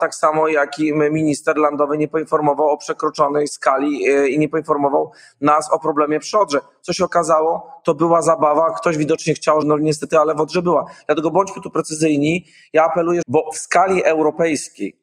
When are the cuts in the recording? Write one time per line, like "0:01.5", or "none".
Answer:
0:09.6
0:13.2